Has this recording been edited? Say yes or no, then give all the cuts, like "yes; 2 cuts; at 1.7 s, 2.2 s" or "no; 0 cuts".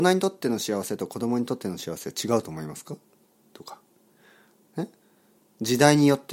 no; 0 cuts